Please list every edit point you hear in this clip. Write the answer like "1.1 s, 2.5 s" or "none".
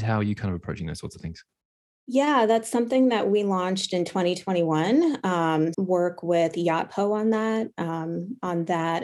5.7 s